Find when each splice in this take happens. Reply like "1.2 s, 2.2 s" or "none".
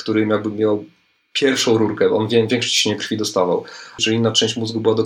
4.0 s